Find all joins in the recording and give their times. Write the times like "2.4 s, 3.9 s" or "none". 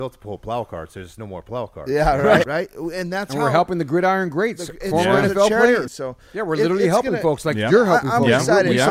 2.4 s, 5.9 s